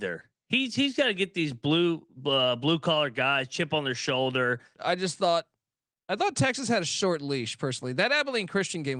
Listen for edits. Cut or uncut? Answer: cut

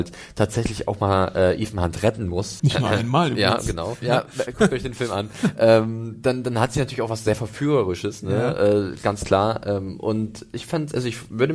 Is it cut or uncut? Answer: cut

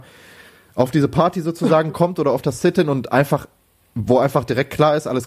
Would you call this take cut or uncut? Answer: uncut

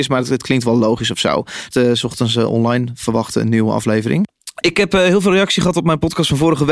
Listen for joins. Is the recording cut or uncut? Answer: cut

